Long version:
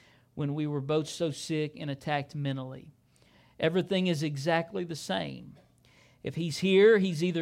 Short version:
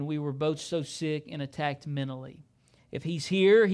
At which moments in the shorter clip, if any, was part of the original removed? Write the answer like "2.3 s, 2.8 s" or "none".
2.8 s